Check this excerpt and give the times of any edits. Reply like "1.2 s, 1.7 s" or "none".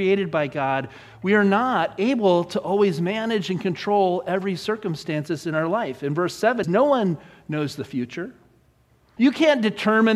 6.6 s, 9.2 s